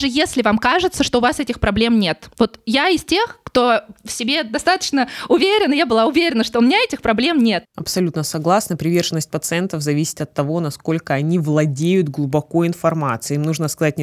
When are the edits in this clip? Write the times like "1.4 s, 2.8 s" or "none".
7.6 s